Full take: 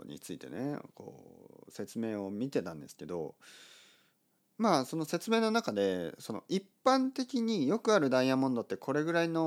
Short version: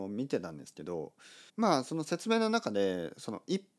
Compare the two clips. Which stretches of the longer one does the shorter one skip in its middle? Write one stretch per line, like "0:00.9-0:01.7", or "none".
0:03.7-0:04.5